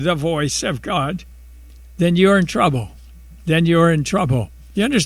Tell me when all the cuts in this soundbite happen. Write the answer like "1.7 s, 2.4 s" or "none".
none